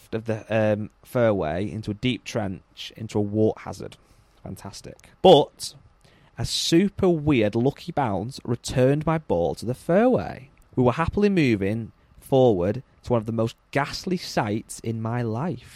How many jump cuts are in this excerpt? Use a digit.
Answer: 2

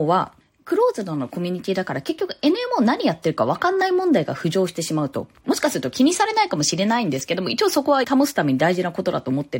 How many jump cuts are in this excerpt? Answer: 2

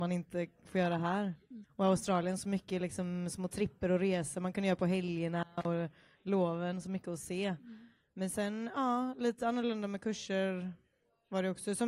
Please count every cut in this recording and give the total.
1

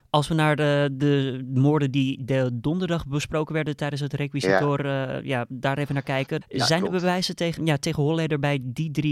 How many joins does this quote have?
2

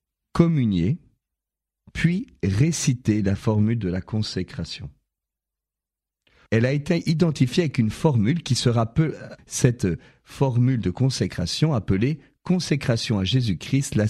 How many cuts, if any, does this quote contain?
2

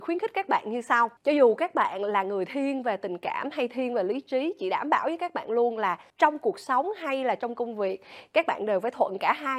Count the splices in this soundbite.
2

